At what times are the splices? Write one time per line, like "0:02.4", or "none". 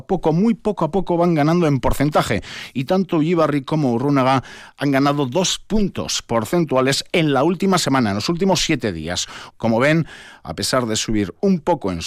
0:09.5